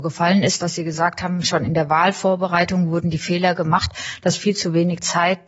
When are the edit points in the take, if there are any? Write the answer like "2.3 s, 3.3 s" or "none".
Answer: none